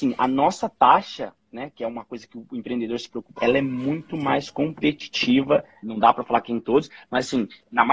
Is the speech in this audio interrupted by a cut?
yes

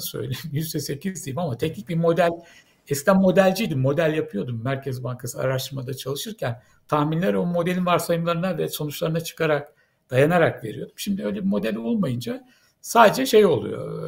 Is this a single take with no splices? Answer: yes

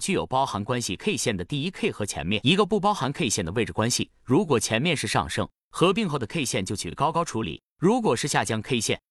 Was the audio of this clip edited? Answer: no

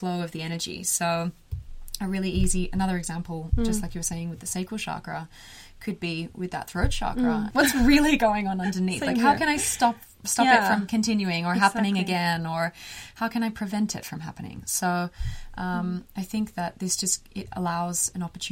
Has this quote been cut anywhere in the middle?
yes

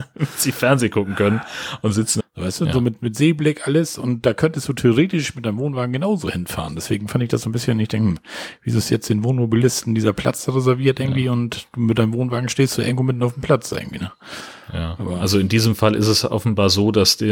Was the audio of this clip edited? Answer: yes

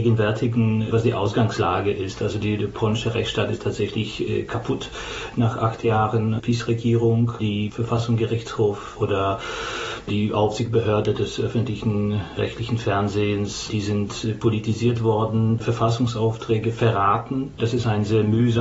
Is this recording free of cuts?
no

